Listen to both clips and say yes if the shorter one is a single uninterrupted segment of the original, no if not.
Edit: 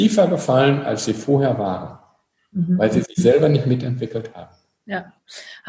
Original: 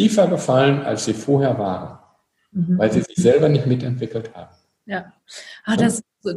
yes